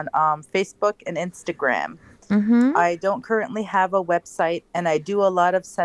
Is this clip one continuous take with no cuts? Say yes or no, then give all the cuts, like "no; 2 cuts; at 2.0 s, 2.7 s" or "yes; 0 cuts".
yes; 0 cuts